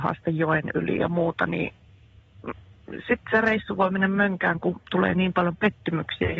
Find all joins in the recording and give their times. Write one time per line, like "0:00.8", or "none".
none